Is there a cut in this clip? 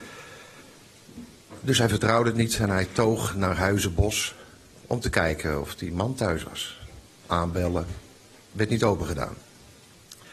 no; 0 cuts

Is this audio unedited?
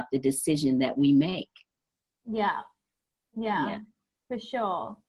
yes; 0 cuts

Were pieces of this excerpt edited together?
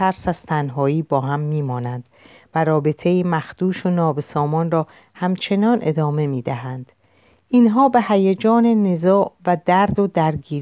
no; 0 cuts

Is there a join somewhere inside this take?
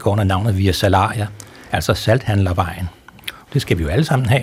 yes; 1 cut; at 3.5 s

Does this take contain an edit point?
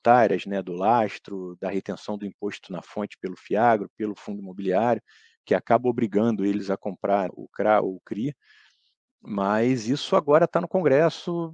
yes; 1 cut; at 7.3 s

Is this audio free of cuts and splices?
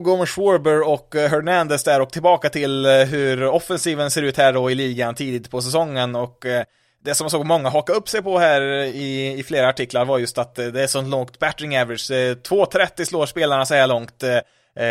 yes; 0 cuts

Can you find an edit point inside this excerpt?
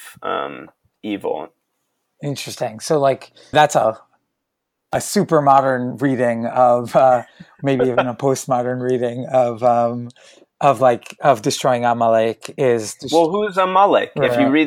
yes; 1 cut; at 3.5 s

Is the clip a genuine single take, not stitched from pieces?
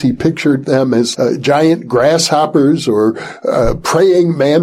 no; 1 cut; at 1.1 s

